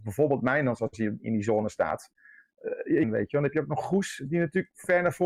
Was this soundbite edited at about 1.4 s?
no; 1 cut; at 3.0 s

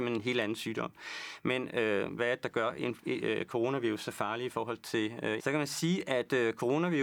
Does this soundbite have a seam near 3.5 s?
no; 2 cuts; at 2.2 s, 5.4 s

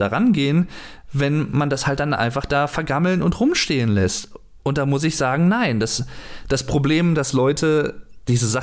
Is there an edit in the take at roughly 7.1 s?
no; 1 cut; at 4.6 s

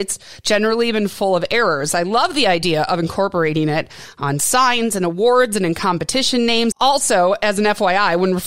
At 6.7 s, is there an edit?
yes; 1 cut; at 6.7 s

